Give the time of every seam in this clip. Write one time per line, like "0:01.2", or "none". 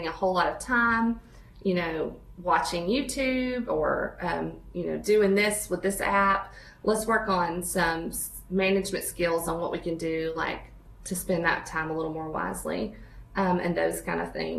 none